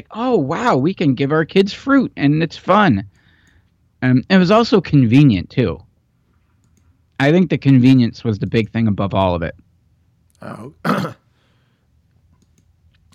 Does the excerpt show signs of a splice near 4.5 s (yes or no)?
no